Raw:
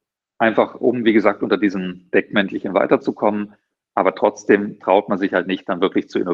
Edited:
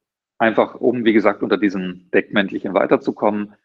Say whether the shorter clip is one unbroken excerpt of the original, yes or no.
yes